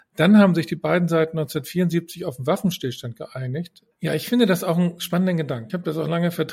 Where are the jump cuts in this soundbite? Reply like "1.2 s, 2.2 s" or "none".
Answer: 3.9 s

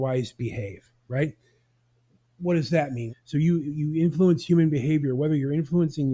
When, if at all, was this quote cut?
3.1 s

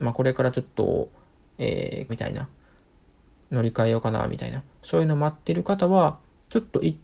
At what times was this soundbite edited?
2.1 s

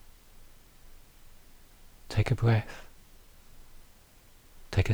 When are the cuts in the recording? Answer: none

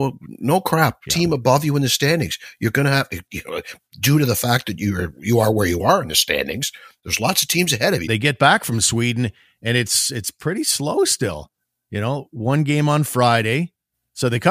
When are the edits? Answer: 1.1 s, 8.1 s

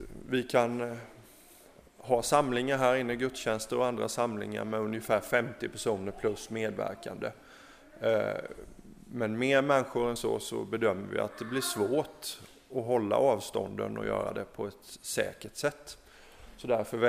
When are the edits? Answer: none

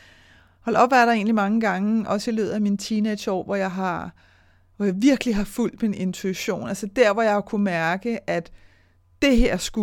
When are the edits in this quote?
none

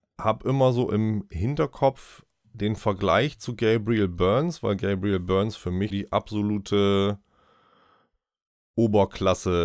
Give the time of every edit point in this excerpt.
5.9 s

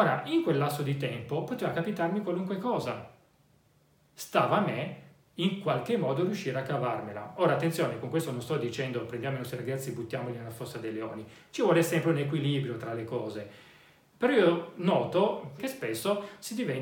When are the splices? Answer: 15.6 s

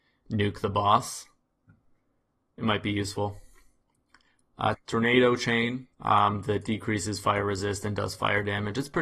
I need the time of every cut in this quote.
4.7 s, 5.9 s

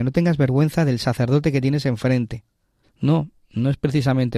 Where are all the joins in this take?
2.8 s

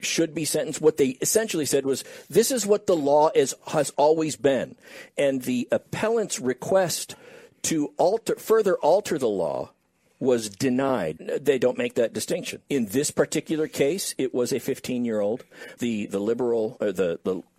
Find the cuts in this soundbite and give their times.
11.2 s, 12.7 s, 15.8 s

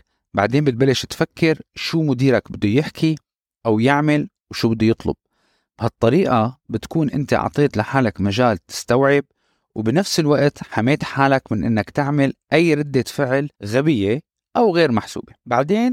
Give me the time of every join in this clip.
13.5 s

